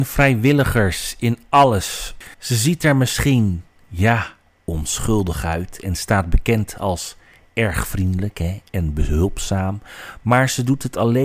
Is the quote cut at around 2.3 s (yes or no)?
yes